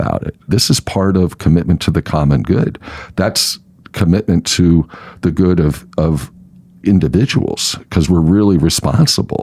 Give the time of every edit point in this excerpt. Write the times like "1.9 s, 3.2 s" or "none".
none